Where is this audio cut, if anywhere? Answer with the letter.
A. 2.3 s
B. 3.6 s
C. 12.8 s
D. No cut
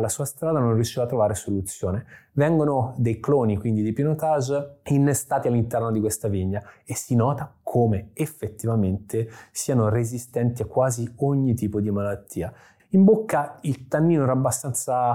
C